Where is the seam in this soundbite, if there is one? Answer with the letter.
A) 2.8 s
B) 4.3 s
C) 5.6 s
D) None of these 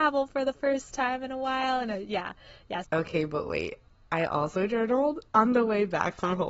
A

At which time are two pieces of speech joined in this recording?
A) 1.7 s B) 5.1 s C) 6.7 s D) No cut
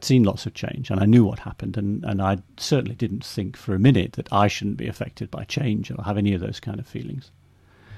D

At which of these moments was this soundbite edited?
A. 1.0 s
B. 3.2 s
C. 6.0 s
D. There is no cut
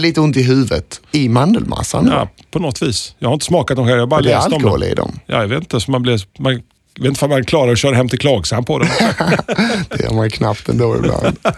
A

